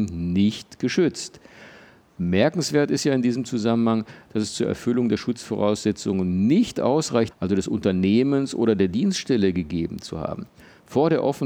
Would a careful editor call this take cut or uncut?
cut